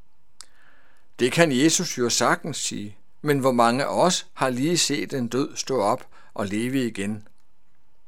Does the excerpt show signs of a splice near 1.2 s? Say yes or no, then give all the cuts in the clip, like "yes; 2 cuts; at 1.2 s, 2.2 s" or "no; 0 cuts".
no; 0 cuts